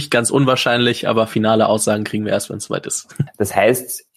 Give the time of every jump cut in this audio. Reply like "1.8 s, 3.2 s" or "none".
3.3 s